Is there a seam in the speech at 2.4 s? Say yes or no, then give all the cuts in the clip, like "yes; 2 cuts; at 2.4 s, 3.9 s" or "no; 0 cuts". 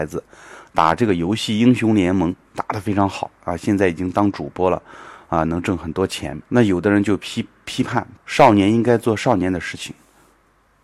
no; 2 cuts; at 6.4 s, 8.2 s